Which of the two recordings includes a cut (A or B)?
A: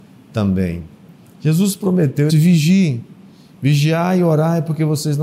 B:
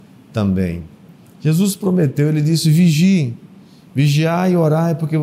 A